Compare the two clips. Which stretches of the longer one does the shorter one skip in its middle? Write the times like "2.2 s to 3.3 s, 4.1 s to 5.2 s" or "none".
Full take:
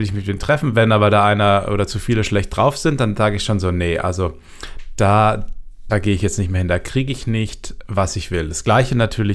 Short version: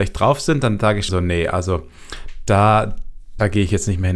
3.5 s to 3.6 s